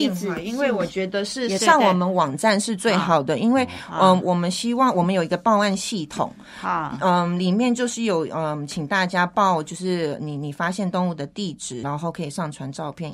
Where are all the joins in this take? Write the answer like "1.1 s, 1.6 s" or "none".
1.6 s, 11.8 s